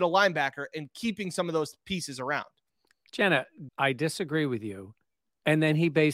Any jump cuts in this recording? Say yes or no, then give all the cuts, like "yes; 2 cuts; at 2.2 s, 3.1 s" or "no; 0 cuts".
yes; 1 cut; at 3.7 s